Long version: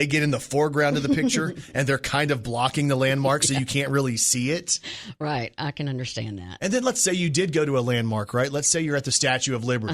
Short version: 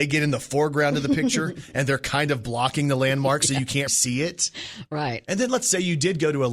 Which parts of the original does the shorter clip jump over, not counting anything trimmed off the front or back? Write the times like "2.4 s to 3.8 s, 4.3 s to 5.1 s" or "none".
3.9 s to 4.2 s, 5.5 s to 6.6 s